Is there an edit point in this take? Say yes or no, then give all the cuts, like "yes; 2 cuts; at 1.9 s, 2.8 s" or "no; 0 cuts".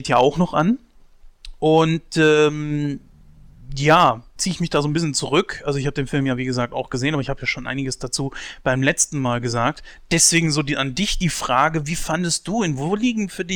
yes; 1 cut; at 4.4 s